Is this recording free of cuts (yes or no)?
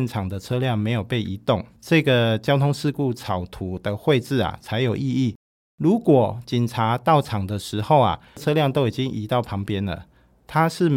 yes